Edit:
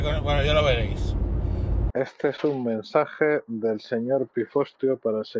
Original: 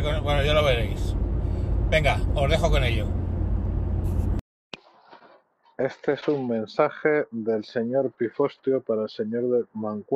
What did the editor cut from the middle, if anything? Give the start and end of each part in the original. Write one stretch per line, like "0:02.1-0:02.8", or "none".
0:01.9-0:05.7